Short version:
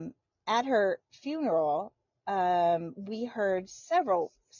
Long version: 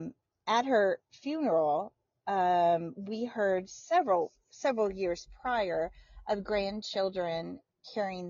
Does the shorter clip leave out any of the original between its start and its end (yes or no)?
no